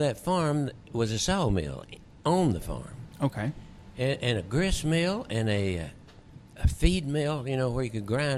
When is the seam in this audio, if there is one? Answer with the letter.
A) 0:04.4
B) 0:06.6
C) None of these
B